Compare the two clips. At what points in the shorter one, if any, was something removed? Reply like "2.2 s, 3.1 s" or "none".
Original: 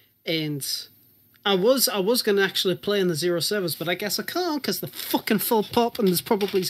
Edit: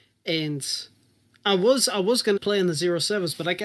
2.4 s